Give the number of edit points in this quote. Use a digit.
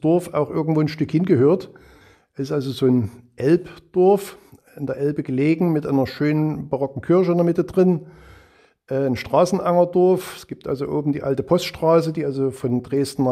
0